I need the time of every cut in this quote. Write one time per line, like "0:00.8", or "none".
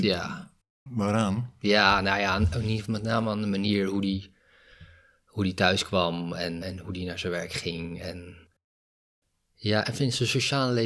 0:06.6

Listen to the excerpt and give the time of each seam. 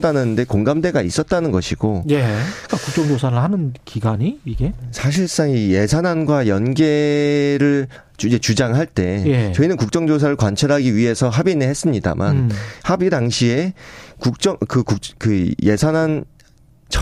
0:02.7

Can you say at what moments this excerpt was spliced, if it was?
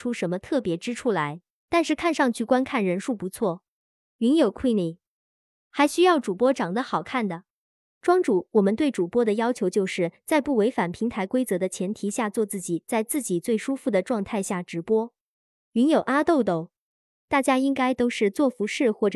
0:05.5

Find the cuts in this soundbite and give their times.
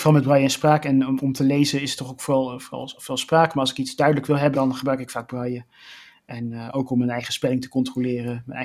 0:04.5

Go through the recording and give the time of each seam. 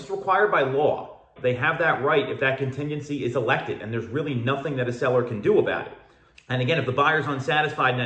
0:01.4
0:06.3

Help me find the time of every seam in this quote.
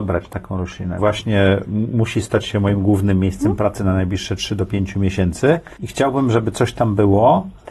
0:01.0

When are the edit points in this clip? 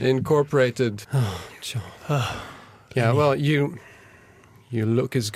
0:01.0

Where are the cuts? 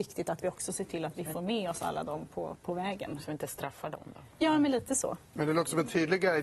none

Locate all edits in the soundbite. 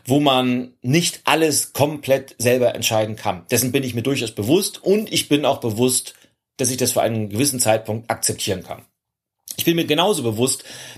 none

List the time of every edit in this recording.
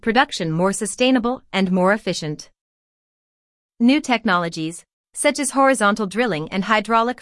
none

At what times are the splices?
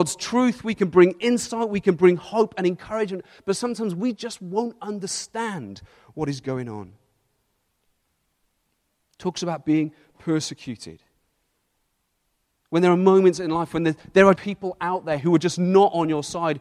0:14.4

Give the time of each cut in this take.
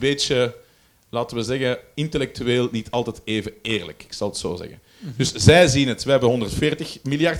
none

